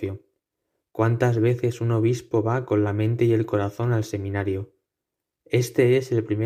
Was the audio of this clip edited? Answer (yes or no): no